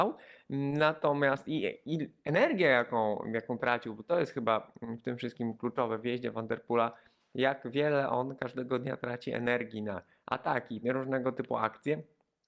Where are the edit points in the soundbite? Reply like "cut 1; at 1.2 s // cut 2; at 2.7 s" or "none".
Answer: cut 1; at 10.8 s